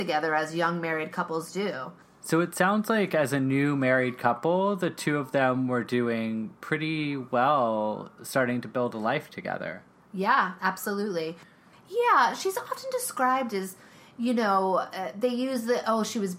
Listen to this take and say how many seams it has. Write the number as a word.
one